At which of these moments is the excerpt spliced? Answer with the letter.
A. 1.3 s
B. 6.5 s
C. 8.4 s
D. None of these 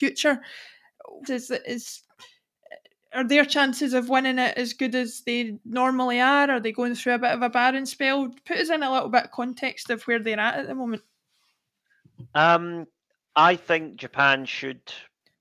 A